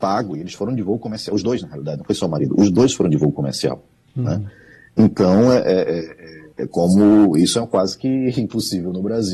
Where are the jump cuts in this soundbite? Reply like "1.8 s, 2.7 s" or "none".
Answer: 6.5 s